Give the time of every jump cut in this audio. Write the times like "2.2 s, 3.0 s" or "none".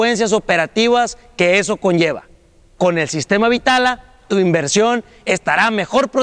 none